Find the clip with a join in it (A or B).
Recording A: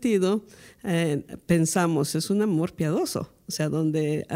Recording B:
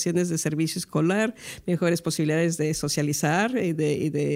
B